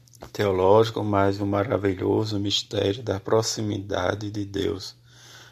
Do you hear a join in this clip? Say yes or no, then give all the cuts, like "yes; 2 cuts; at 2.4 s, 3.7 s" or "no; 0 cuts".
no; 0 cuts